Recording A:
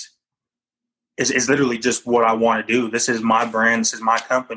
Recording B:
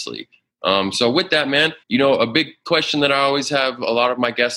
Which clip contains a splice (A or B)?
B